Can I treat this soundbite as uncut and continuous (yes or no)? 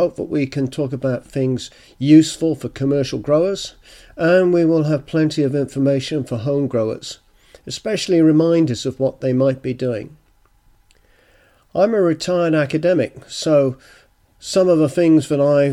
yes